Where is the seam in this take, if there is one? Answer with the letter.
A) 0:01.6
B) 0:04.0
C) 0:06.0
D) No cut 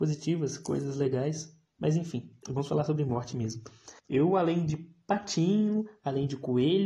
B